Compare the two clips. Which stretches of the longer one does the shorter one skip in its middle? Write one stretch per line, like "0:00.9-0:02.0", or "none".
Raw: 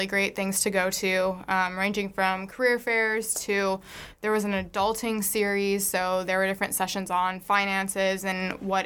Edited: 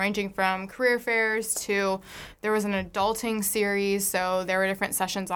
none